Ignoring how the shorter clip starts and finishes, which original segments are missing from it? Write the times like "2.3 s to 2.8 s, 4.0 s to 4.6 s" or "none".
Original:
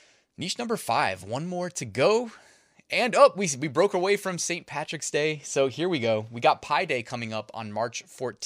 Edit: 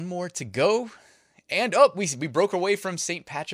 none